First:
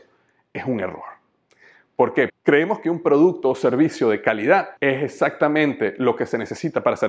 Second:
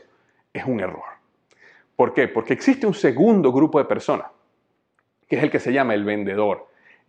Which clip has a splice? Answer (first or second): first